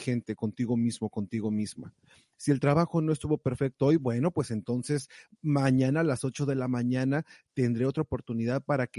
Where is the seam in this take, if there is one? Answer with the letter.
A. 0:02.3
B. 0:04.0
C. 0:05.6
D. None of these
D